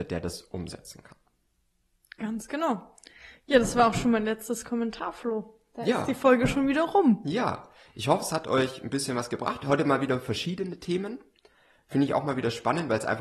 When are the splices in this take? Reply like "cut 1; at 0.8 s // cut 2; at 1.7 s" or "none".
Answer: none